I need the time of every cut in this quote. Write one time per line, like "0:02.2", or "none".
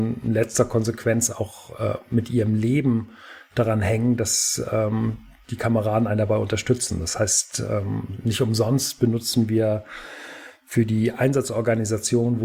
none